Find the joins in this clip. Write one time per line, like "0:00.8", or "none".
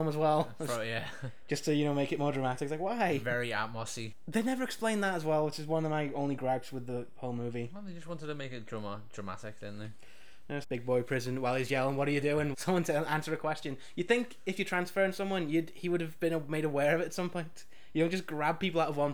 0:10.6
0:12.5

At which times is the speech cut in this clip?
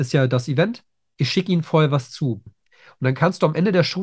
0:02.5

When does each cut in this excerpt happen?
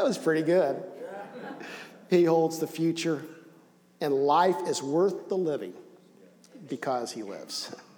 0:06.7

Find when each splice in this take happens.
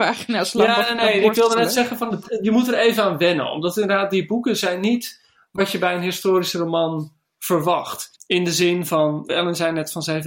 0:08.2
0:09.3

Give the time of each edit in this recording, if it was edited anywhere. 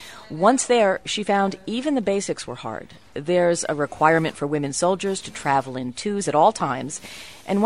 none

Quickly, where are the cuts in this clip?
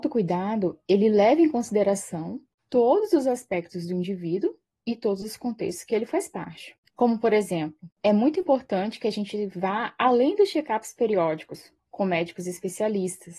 0:06.9

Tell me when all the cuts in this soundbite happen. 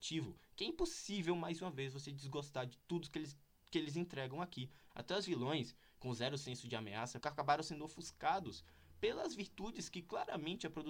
0:04.9
0:07.2

